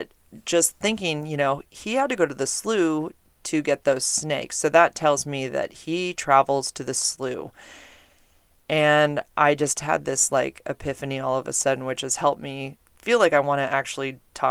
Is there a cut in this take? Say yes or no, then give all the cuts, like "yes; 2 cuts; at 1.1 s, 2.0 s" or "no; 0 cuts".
yes; 1 cut; at 12.8 s